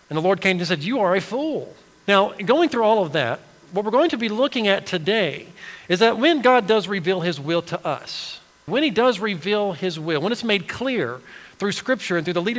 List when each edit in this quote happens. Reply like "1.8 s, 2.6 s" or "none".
2.1 s, 8.7 s